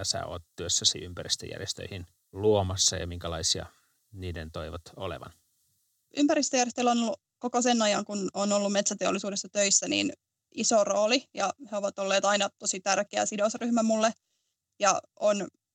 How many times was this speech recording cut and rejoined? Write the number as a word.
zero